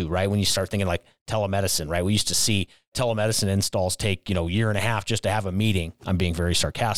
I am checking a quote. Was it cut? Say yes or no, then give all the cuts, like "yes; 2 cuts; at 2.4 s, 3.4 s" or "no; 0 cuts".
no; 0 cuts